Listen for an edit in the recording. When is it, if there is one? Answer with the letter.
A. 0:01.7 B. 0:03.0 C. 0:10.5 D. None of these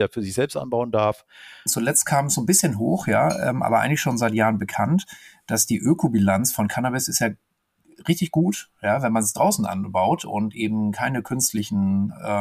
A